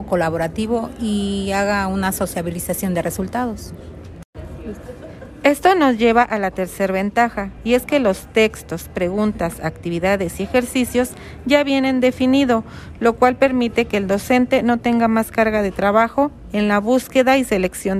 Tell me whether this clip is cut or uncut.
uncut